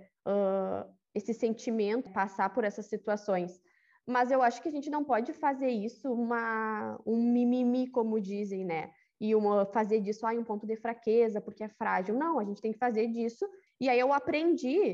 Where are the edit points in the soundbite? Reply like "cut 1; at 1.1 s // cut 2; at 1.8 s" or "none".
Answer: cut 1; at 2.1 s // cut 2; at 13.7 s